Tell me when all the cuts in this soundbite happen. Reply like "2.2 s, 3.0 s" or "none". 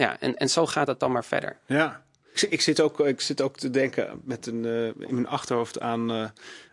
2.3 s